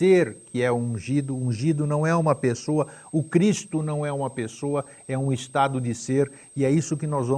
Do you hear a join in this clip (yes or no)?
no